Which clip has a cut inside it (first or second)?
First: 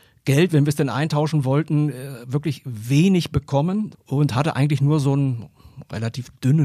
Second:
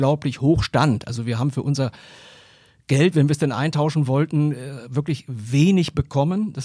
first